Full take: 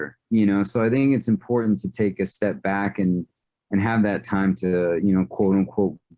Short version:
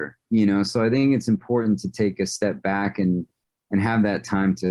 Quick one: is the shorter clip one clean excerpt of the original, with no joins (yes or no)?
yes